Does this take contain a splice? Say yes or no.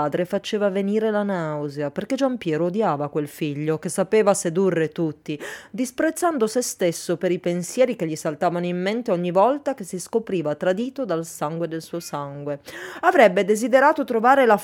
no